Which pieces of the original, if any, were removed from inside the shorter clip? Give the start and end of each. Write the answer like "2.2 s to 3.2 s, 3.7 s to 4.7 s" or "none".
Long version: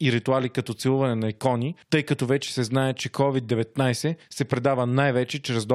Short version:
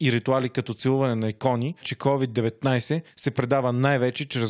1.8 s to 2.9 s